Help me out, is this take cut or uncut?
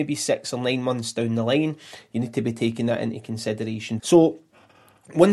cut